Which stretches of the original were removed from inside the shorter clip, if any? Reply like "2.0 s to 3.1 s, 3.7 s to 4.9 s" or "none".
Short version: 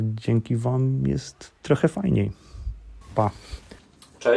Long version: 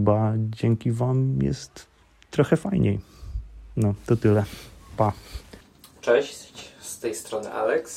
1.9 s to 2.2 s, 3.7 s to 4.8 s